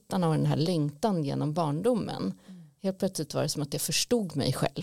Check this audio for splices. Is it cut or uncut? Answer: uncut